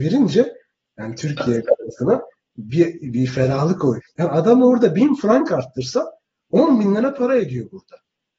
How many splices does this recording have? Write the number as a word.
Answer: one